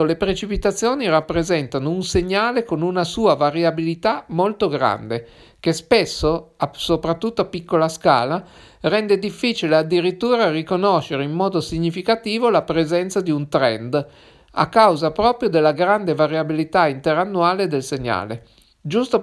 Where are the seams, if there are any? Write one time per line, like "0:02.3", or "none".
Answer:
none